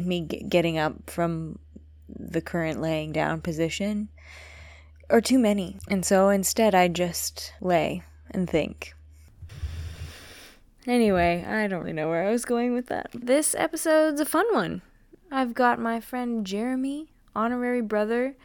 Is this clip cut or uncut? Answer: cut